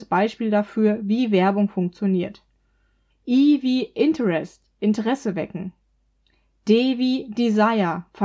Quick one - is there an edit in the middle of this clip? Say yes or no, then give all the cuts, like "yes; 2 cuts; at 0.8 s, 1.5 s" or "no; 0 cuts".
yes; 1 cut; at 3.1 s